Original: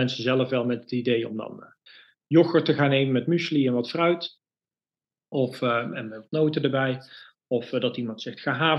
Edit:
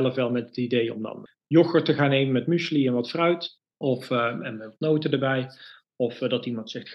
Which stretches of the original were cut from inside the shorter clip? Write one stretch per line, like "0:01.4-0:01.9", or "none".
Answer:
0:01.6-0:02.1
0:04.5-0:05.2

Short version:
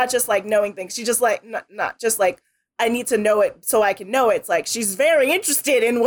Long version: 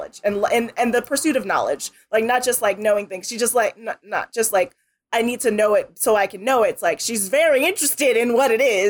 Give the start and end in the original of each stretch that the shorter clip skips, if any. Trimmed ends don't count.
none

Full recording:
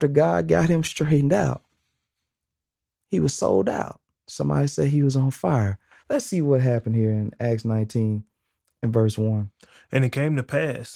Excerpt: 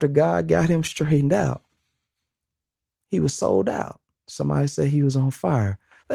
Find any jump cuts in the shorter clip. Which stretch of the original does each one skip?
none

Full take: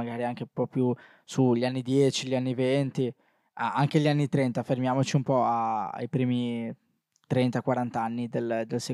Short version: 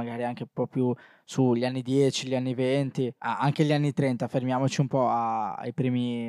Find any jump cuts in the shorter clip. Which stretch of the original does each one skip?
0:03.2-0:03.5

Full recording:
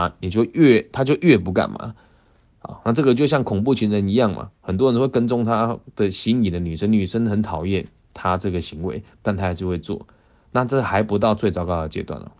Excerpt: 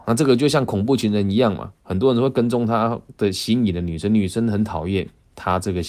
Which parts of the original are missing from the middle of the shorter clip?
none

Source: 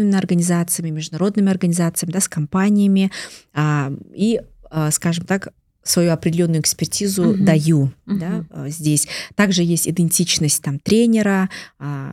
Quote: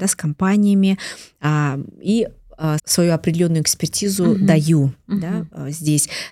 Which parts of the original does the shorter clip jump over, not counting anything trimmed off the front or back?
0:04.9-0:05.8

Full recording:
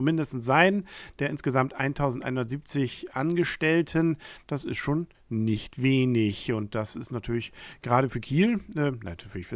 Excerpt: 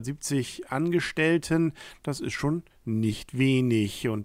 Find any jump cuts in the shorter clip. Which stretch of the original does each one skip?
none

